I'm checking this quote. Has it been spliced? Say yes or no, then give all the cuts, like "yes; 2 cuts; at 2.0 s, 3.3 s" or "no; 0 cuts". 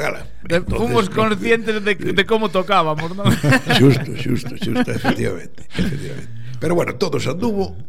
no; 0 cuts